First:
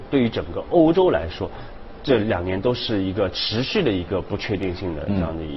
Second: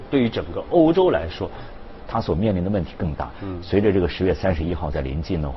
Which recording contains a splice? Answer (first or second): second